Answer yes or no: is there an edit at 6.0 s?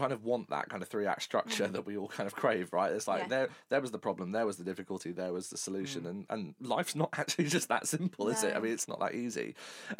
no